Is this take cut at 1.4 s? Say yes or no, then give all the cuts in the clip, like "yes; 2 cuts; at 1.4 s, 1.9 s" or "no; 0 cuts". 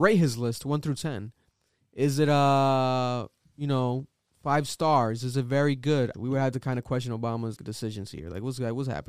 no; 2 cuts; at 6.1 s, 7.6 s